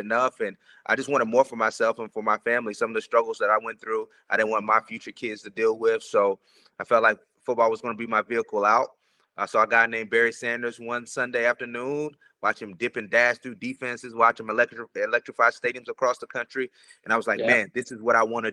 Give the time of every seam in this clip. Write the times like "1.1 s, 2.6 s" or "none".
none